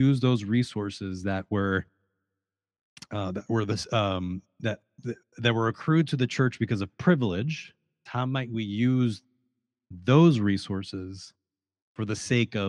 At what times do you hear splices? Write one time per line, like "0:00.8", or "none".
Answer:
0:08.1